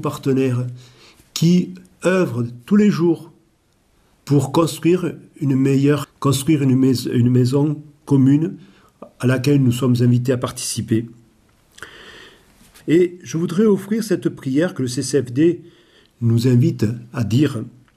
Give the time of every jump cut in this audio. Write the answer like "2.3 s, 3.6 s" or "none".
4.1 s, 6.0 s, 12.8 s